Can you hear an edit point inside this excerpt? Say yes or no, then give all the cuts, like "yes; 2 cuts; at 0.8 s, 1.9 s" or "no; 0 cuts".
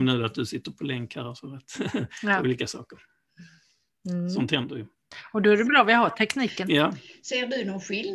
no; 0 cuts